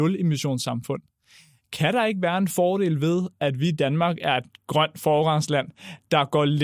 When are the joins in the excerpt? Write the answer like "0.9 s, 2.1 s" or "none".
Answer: none